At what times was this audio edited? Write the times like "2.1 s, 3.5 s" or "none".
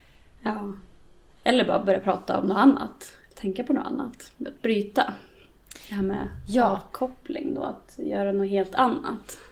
1.3 s

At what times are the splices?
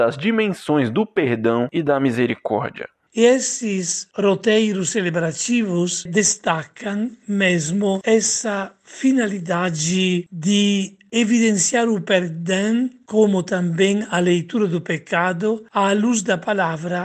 6.1 s

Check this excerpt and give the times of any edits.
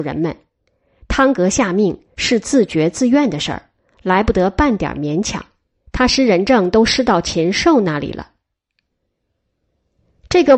5.9 s

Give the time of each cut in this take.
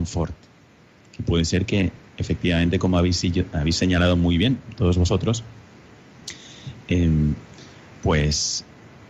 none

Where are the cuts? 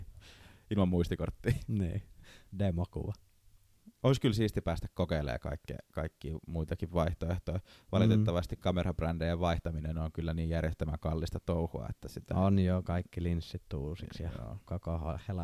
none

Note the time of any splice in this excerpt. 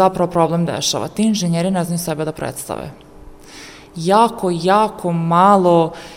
none

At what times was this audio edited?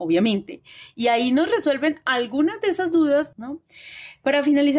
3.3 s

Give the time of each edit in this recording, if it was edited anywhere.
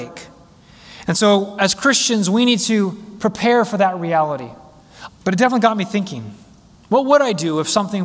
5.1 s

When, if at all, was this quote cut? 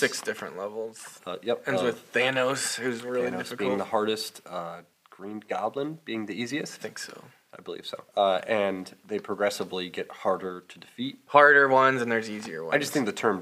8.1 s, 11.3 s

